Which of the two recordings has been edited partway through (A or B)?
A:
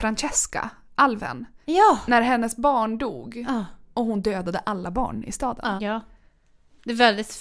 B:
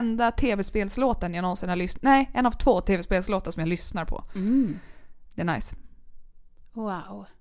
A